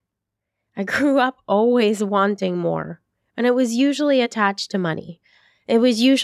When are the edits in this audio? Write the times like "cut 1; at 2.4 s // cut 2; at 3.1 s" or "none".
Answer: none